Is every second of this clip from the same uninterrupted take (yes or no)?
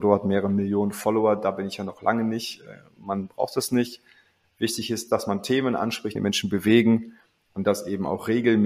no